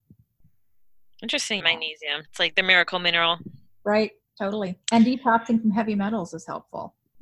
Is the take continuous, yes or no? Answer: no